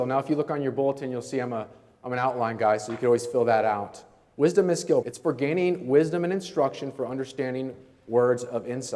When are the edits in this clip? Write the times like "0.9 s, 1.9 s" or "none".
5.0 s